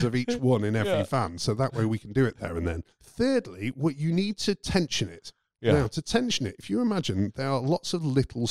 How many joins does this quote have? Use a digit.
1